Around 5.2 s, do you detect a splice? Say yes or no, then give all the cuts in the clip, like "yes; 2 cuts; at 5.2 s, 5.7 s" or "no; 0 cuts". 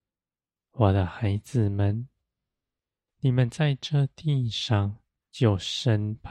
yes; 1 cut; at 5.2 s